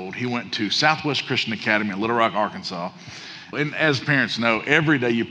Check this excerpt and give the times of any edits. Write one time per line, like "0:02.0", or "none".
0:03.5